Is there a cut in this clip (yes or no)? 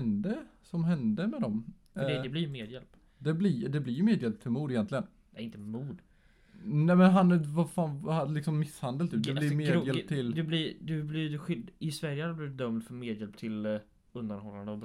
no